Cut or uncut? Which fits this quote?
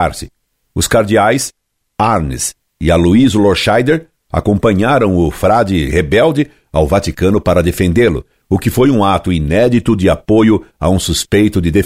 uncut